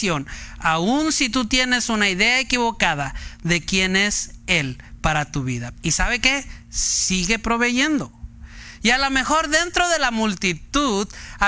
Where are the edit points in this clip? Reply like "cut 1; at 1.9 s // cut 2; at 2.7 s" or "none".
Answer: cut 1; at 5.7 s